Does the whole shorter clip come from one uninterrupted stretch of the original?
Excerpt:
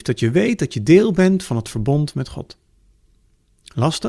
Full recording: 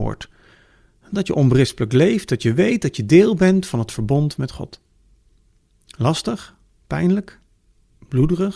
yes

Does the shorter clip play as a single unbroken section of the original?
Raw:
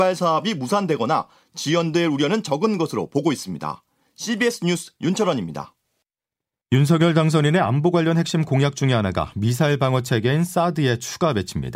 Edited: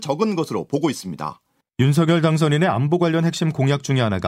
no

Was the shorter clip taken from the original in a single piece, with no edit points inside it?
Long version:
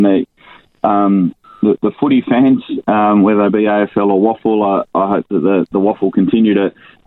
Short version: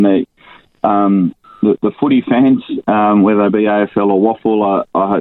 yes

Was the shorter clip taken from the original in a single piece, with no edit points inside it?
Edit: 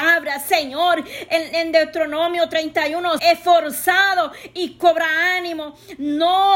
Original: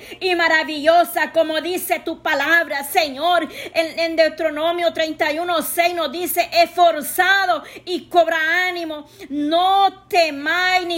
no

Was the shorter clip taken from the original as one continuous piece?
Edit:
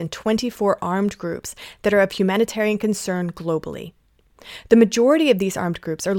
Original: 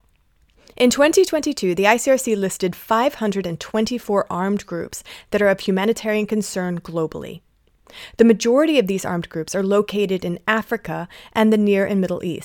yes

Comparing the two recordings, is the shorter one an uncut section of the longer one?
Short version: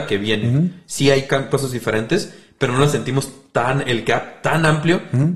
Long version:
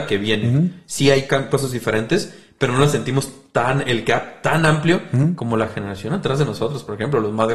yes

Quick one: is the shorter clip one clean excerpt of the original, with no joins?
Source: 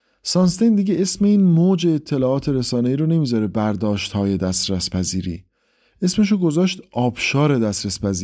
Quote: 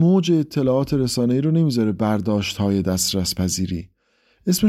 yes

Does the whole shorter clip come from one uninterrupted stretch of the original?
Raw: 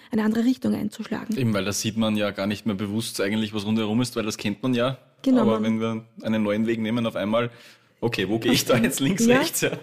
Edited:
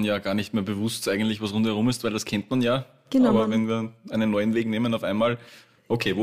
yes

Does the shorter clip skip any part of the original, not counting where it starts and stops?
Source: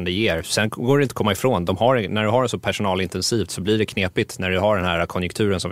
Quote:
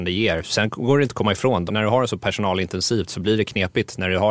yes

